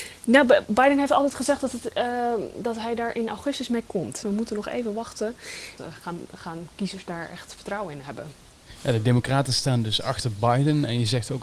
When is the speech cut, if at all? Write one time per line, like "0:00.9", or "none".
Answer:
0:04.2
0:05.8